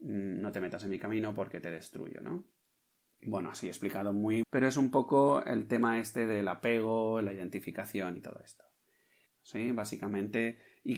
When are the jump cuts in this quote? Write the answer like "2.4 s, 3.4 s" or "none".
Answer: 4.4 s, 9.3 s